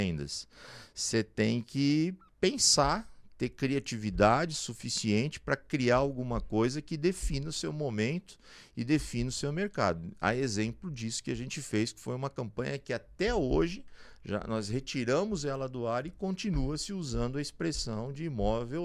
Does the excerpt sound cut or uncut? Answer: uncut